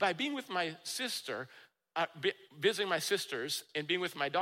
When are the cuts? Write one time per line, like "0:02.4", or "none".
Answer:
none